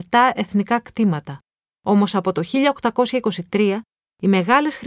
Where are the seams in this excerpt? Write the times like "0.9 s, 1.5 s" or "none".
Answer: 1.7 s